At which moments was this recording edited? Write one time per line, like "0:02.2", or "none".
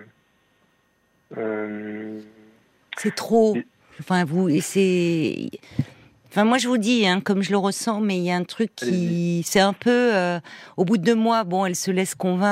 none